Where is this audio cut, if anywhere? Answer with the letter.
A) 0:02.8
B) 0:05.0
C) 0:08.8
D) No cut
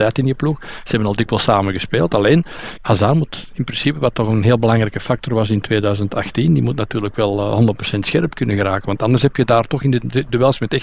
A